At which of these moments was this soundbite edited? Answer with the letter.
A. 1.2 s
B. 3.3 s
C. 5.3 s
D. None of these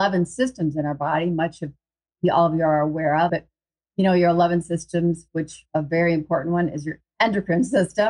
B